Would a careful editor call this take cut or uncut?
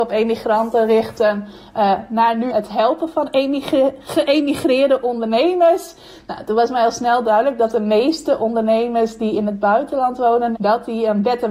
cut